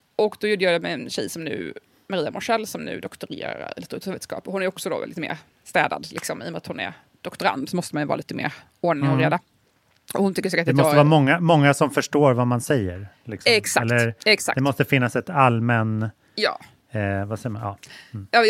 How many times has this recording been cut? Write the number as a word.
zero